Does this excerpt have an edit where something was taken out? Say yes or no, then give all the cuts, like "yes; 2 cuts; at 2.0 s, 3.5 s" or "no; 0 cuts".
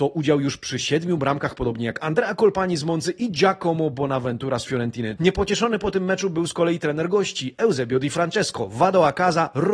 yes; 1 cut; at 5.2 s